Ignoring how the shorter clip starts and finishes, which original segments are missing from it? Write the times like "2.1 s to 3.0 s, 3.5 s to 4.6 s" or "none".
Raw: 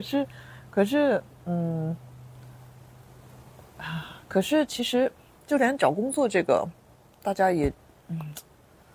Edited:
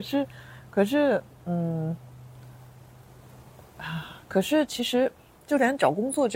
none